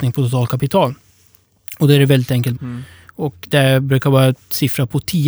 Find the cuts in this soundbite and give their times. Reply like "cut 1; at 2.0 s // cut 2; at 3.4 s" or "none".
cut 1; at 2.5 s